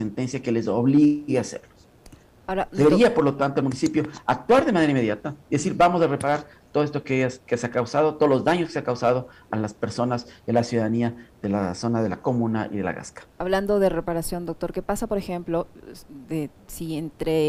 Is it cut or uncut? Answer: cut